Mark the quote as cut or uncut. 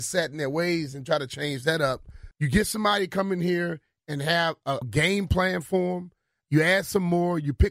cut